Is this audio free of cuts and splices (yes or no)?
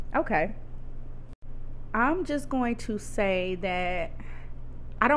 yes